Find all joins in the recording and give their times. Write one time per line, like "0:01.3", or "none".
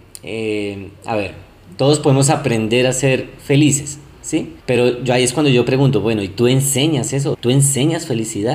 0:04.6
0:07.3